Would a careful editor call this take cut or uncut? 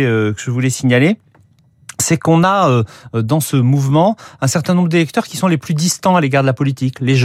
uncut